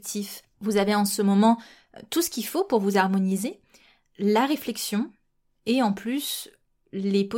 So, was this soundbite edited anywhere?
no; 0 cuts

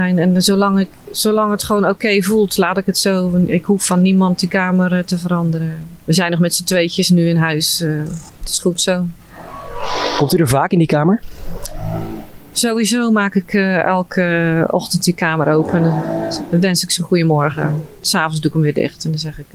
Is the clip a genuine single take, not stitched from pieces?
yes; 0 cuts

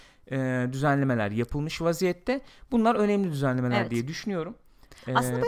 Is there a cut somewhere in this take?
no; 0 cuts

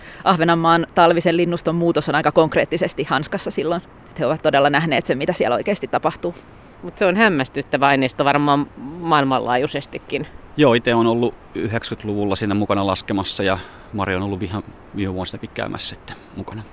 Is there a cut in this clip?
yes; 1 cut; at 10.5 s

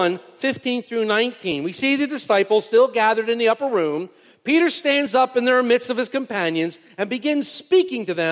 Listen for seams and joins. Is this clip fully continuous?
yes; 0 cuts

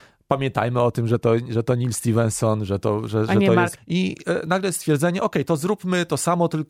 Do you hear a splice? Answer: yes; 1 cut; at 3.8 s

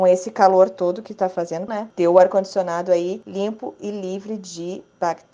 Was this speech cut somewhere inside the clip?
yes; 1 cut; at 1.7 s

